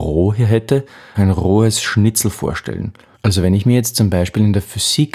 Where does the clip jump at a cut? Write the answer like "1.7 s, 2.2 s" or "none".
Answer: 1.1 s, 3.1 s